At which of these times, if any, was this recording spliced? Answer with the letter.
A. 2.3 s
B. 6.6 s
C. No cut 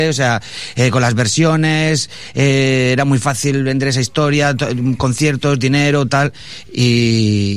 B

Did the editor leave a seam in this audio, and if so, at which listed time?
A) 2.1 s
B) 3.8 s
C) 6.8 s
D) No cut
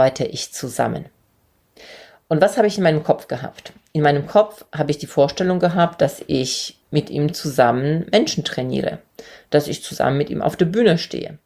C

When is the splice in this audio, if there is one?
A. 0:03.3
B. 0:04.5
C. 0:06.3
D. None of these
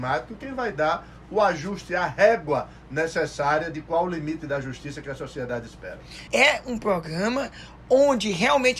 C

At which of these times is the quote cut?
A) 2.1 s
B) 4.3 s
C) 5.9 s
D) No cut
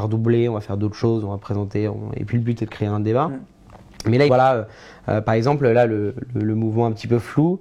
B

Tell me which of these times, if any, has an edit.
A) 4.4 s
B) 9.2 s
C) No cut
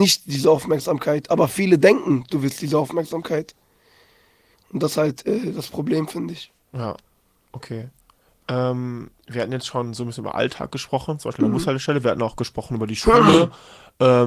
C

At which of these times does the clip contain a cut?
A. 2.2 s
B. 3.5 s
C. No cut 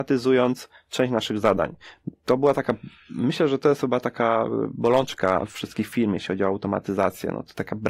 C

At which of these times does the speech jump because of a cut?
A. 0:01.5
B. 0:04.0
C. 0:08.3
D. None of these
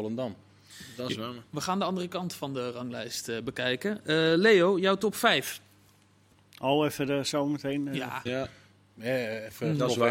C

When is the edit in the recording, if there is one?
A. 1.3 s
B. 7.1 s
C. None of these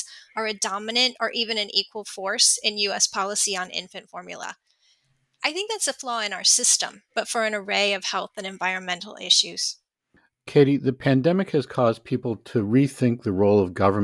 B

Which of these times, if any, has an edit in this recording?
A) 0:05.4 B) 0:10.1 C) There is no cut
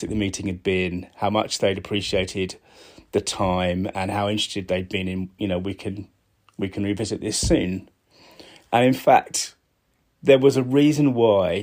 A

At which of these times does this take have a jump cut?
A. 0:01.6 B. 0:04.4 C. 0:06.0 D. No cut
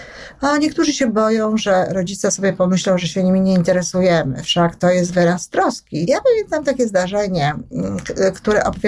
C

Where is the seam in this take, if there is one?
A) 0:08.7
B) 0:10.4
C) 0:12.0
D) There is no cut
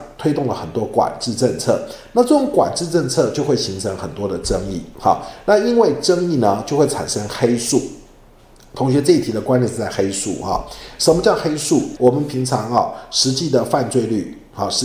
C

